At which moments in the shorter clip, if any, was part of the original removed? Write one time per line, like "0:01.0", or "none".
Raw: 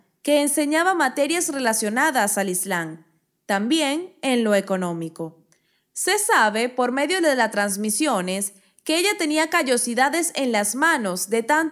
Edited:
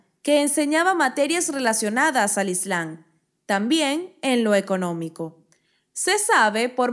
none